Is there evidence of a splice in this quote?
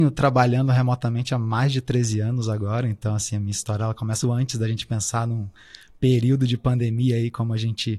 yes; 1 cut; at 4.2 s

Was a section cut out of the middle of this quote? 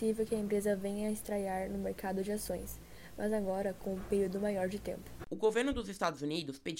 no; 0 cuts

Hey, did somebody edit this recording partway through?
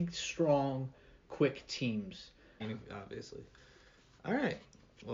yes; 1 cut; at 2.6 s

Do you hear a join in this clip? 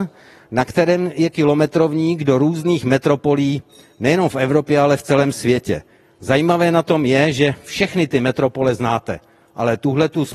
no; 0 cuts

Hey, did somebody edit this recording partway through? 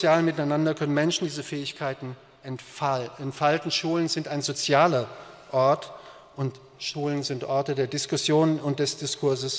no; 0 cuts

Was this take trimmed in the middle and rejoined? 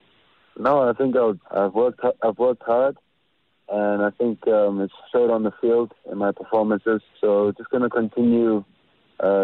yes; 2 cuts; at 1.4 s, 7.1 s

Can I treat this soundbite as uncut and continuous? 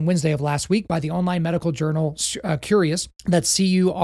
no; 1 cut; at 3.2 s

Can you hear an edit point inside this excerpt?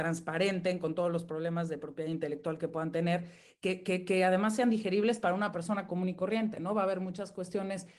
no; 0 cuts

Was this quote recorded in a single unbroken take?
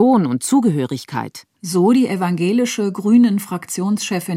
no; 1 cut; at 1.5 s

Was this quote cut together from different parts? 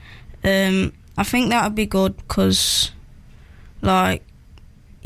no; 0 cuts

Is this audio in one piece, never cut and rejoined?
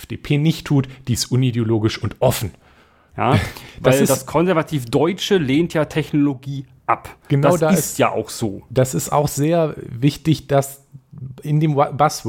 no; 1 cut; at 3.1 s

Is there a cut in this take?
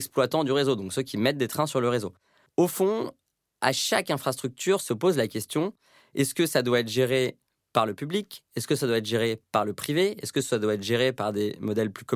no; 0 cuts

